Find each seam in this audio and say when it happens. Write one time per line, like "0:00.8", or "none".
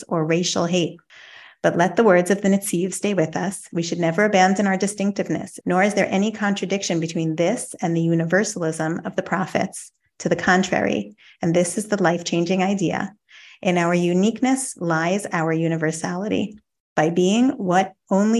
0:05.6